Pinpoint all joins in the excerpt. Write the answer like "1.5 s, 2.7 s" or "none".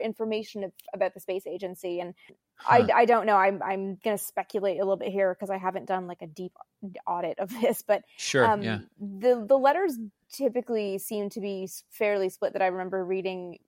none